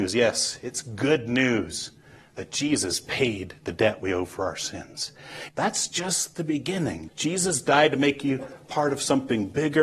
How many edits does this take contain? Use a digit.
2